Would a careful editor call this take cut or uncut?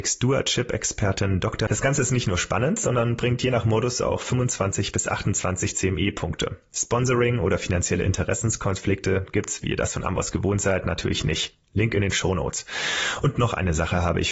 cut